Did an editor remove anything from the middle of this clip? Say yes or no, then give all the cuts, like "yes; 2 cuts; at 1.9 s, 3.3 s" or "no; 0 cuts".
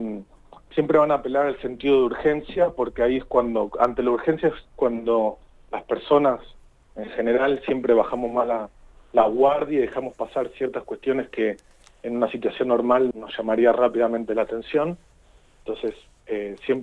yes; 1 cut; at 13.1 s